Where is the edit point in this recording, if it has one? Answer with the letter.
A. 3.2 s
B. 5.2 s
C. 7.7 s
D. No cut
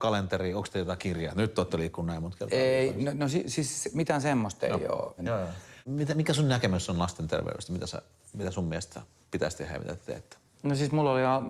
B